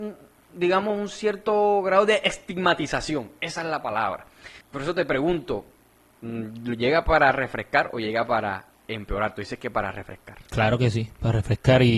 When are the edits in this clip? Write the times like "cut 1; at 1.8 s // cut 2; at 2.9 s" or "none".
cut 1; at 4.6 s